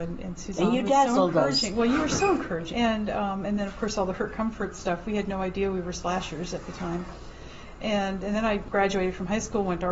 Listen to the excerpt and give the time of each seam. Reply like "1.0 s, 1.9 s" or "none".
2.7 s